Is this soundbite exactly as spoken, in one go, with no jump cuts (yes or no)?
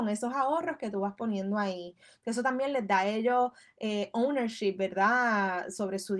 no